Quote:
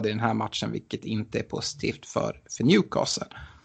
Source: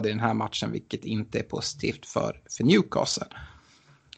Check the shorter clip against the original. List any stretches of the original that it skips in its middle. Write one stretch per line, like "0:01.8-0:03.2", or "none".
none